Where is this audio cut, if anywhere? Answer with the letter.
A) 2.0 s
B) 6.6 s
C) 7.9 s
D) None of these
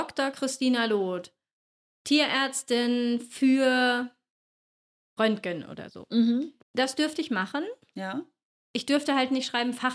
B